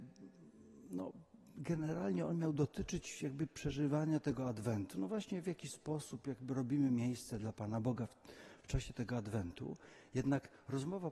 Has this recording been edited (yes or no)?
no